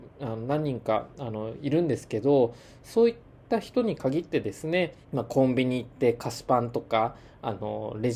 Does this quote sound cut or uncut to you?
cut